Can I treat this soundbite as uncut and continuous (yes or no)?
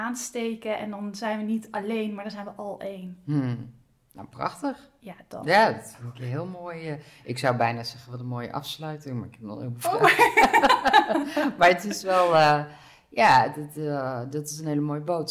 yes